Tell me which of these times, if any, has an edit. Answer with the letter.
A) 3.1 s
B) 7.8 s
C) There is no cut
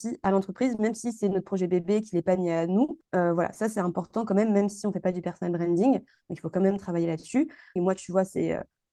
B